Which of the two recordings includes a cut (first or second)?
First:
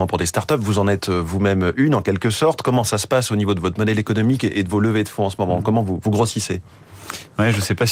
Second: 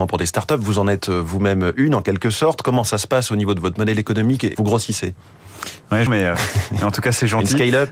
second